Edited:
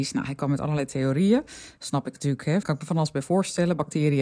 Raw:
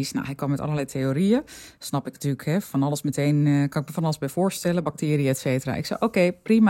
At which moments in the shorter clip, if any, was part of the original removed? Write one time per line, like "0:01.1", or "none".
0:02.6